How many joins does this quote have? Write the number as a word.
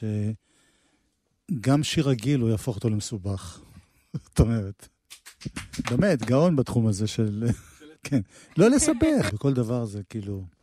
three